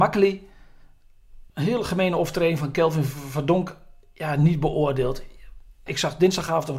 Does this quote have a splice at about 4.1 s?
no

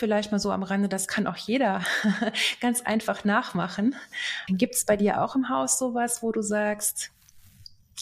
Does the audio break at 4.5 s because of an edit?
yes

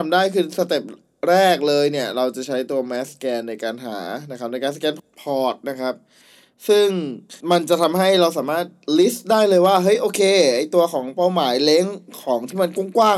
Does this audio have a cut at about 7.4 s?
yes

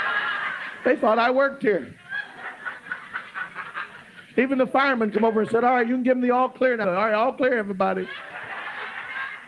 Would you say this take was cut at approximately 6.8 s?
yes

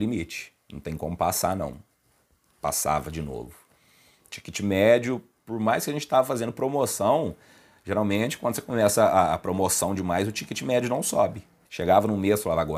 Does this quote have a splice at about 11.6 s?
yes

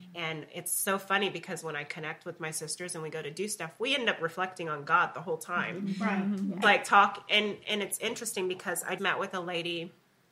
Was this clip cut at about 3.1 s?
no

